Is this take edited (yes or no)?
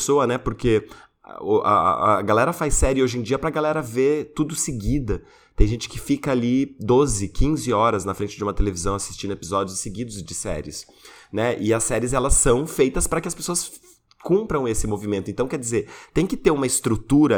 no